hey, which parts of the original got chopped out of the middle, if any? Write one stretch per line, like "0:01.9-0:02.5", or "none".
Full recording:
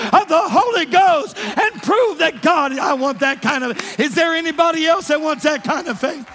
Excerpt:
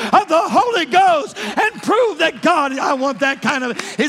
none